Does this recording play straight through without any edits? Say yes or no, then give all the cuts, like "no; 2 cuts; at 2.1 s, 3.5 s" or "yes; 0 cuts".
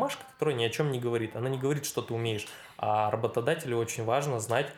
yes; 0 cuts